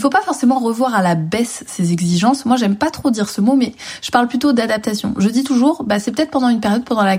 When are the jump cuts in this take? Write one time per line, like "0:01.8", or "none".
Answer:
none